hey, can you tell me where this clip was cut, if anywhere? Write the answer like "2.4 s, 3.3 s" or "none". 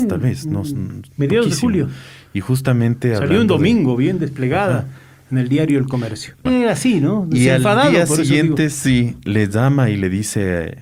6.5 s